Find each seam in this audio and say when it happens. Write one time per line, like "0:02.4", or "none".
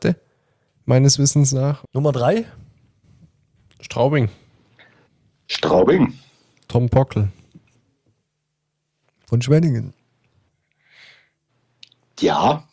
0:01.8
0:09.1